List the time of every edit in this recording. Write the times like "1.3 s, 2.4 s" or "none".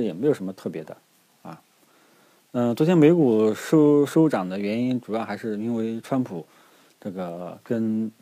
none